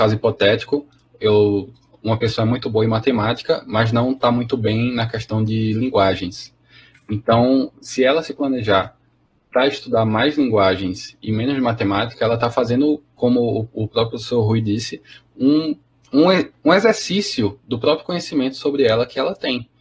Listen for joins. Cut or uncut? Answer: uncut